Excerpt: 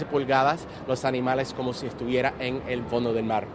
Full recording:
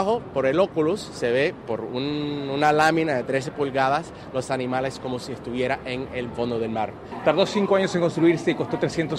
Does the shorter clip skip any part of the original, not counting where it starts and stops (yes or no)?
no